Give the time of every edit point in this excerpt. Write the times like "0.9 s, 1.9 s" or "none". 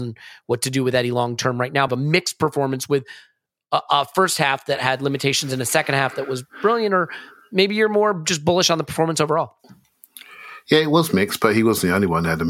1.9 s